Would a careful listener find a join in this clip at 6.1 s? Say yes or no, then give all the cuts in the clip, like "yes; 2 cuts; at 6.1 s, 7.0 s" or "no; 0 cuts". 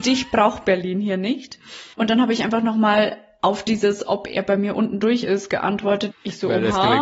yes; 2 cuts; at 1.9 s, 6.1 s